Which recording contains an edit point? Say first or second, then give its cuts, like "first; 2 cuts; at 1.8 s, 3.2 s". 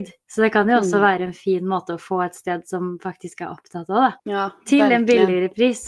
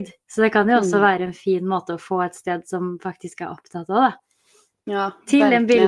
first; 1 cut; at 4.2 s